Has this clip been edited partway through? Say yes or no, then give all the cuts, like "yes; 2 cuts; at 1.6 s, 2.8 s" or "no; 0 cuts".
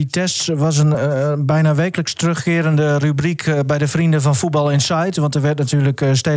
no; 0 cuts